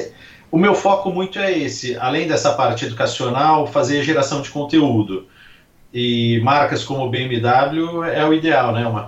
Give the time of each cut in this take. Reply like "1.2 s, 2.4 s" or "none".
none